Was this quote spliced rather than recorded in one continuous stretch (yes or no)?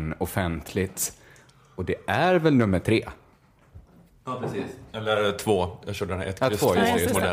no